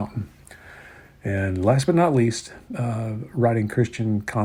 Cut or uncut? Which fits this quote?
uncut